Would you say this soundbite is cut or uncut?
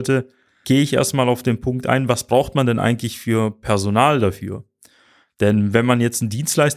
uncut